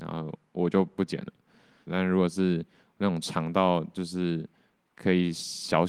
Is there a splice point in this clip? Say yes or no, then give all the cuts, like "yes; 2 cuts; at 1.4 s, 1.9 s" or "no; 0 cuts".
yes; 1 cut; at 1.9 s